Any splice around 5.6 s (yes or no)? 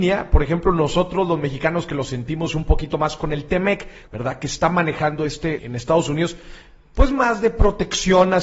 yes